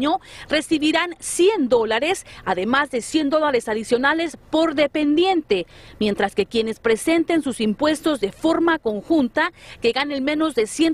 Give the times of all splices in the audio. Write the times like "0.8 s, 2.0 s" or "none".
none